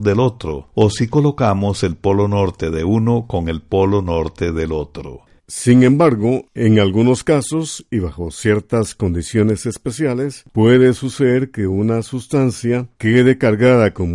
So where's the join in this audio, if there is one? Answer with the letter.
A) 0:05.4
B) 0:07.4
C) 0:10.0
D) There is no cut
A